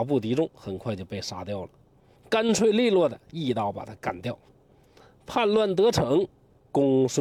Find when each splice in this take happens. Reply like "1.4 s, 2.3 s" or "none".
2.2 s